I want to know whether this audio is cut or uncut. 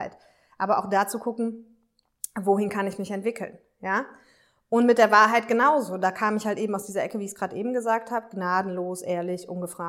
uncut